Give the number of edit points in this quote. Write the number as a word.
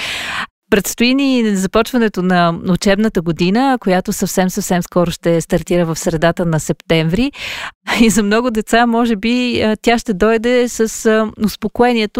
zero